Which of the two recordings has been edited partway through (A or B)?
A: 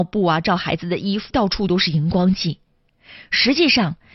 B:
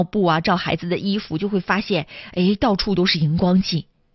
A